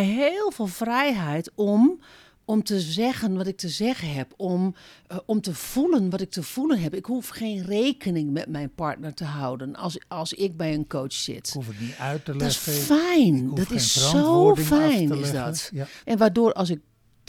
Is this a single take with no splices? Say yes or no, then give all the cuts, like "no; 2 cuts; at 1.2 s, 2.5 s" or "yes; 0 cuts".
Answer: no; 1 cut; at 16.0 s